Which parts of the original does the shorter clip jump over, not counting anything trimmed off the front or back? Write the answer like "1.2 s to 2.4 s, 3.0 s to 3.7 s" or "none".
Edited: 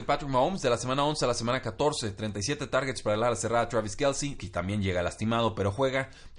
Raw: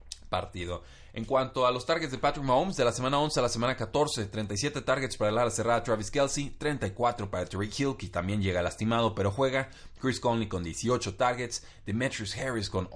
6.5 s to 8.0 s